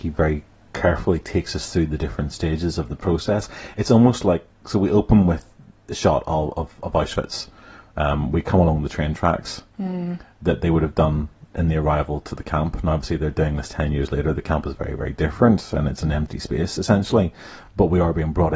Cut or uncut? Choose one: uncut